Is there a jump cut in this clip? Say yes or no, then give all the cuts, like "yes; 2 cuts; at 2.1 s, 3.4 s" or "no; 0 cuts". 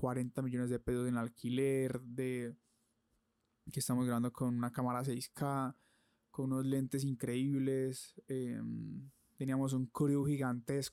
no; 0 cuts